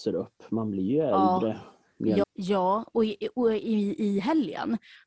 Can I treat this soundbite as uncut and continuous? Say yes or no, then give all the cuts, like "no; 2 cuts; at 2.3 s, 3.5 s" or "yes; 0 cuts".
no; 1 cut; at 2.2 s